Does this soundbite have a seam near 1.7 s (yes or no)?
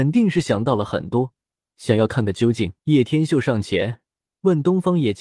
yes